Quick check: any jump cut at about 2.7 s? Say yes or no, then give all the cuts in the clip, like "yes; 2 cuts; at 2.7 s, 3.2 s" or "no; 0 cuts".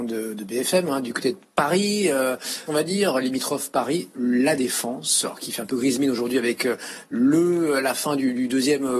yes; 1 cut; at 2.7 s